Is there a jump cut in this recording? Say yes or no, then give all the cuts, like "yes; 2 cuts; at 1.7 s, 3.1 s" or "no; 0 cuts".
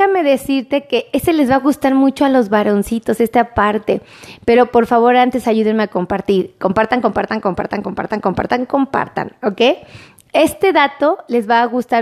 no; 0 cuts